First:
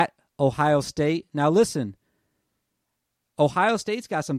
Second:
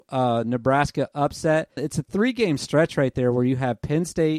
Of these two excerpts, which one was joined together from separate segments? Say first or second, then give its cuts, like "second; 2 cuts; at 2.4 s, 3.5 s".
second; 1 cut; at 1.8 s